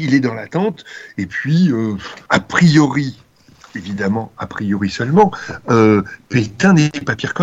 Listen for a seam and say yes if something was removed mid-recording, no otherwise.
yes